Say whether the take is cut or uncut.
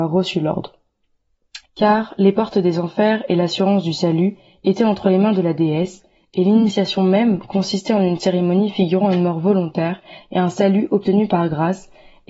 cut